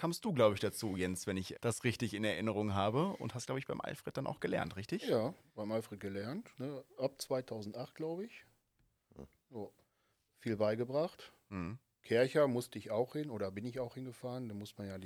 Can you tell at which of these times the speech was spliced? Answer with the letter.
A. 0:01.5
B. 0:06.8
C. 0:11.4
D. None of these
A